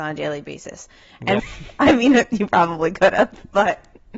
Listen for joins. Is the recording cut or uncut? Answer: cut